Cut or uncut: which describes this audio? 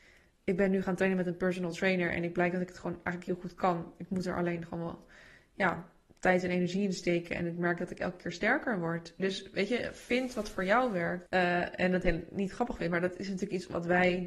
cut